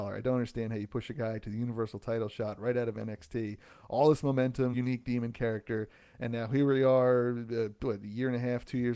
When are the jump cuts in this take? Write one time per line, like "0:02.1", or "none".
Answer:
0:04.7

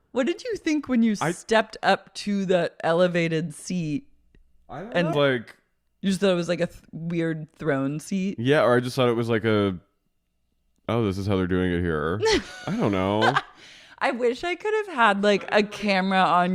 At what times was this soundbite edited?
0:05.1

